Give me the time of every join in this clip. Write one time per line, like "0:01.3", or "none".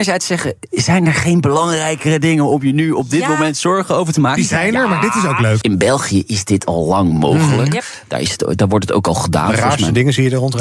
0:05.6